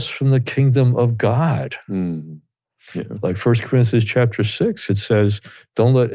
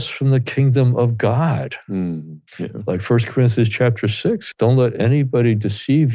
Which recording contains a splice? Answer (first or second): second